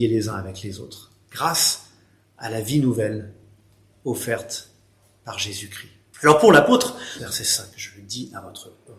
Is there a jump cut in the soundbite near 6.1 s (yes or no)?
yes